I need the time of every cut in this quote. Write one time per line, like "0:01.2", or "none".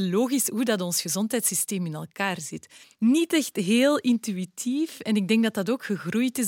0:02.8